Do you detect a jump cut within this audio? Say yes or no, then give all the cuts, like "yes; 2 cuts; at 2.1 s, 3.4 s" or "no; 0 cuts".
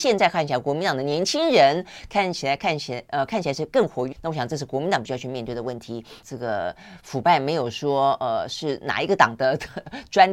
yes; 2 cuts; at 4.1 s, 6.2 s